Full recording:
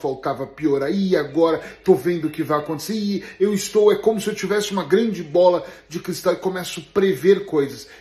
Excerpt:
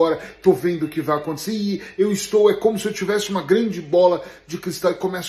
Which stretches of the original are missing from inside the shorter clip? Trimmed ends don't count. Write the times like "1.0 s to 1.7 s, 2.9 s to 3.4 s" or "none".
none

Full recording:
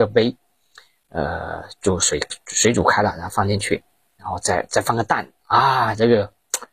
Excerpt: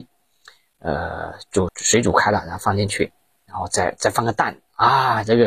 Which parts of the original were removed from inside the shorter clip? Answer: 2.0 s to 2.4 s

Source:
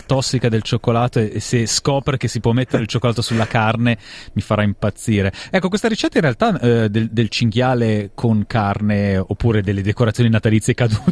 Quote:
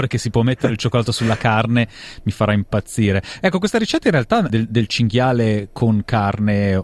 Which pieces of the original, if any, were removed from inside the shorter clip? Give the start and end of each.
6.6 s to 6.9 s

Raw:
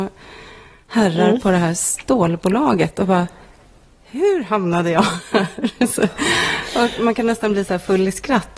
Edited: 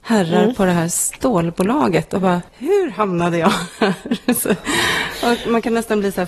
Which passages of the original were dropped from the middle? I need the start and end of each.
3.3 s to 4.0 s

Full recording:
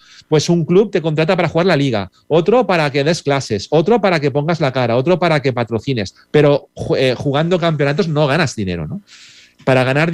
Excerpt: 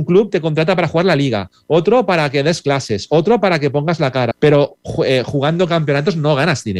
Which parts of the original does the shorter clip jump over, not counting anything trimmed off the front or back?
4.9 s to 6.2 s

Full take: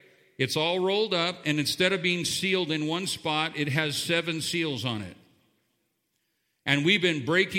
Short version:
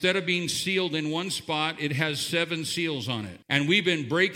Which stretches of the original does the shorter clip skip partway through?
5.2 s to 6.6 s

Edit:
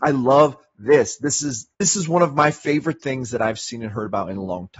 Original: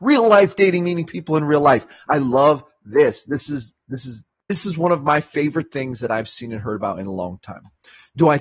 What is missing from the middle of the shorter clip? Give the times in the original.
3.8 s to 4.4 s

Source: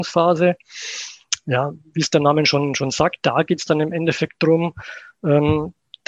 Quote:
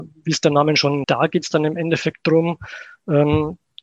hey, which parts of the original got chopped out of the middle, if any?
2.7 s to 3.2 s

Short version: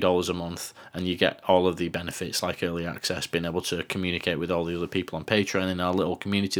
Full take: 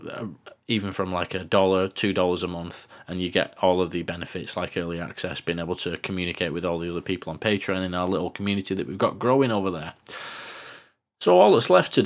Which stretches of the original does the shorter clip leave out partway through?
none

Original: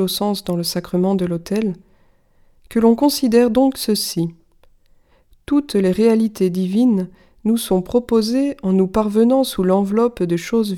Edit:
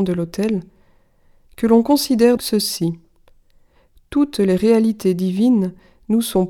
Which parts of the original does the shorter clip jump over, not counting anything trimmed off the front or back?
3.5 s to 3.7 s

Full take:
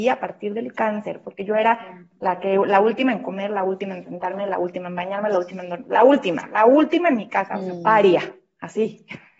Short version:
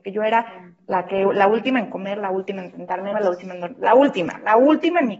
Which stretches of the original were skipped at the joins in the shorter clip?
4.5 s to 5.2 s

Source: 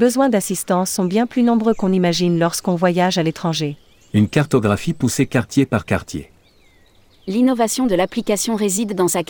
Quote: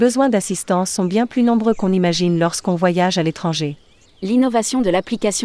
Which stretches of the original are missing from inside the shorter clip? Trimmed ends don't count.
4.1 s to 7.1 s

